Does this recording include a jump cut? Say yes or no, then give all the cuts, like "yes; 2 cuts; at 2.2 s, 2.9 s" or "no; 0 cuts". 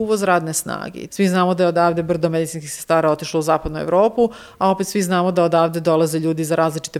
yes; 1 cut; at 1.1 s